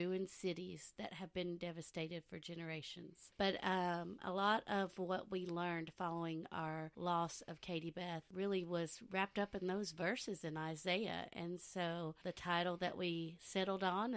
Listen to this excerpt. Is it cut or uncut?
cut